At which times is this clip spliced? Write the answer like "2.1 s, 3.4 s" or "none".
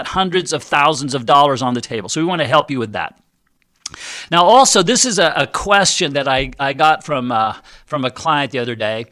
none